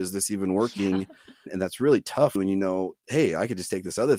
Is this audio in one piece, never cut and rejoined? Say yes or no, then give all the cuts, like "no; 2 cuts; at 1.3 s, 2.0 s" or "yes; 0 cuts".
yes; 0 cuts